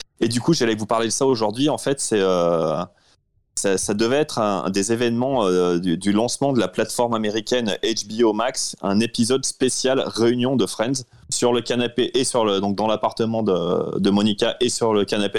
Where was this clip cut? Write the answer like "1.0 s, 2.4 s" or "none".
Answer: 11.3 s